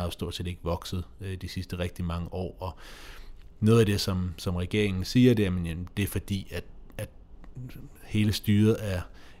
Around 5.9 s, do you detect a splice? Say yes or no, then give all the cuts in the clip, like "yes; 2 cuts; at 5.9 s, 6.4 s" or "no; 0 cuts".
no; 0 cuts